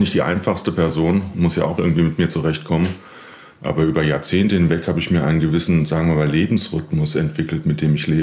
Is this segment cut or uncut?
uncut